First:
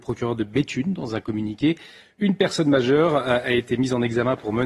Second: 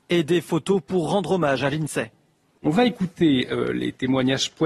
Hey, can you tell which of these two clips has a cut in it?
second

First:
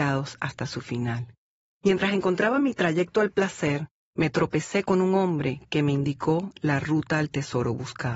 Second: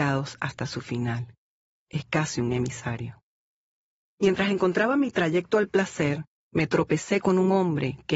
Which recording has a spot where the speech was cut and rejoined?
first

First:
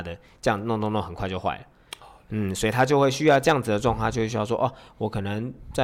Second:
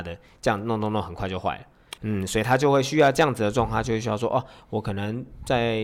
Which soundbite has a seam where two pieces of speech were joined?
second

